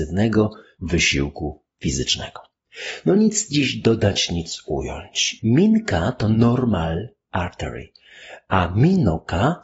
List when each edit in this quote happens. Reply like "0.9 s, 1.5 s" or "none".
5.4 s